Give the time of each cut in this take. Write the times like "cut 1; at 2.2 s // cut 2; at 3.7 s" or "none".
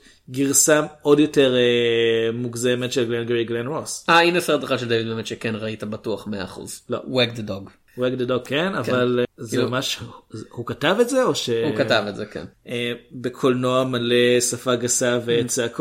cut 1; at 7.9 s // cut 2; at 9.2 s // cut 3; at 12.5 s